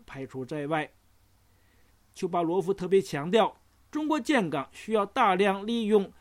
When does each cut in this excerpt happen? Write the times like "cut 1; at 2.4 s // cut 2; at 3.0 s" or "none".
cut 1; at 1.9 s